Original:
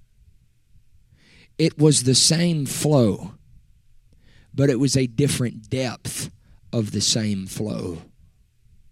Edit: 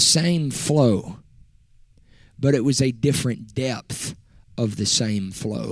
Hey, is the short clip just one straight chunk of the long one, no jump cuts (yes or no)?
yes